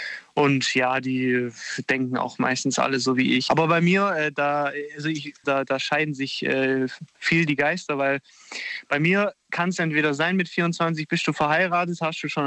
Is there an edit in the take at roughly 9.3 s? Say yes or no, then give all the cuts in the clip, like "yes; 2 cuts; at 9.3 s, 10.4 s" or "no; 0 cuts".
no; 2 cuts; at 3.5 s, 5.4 s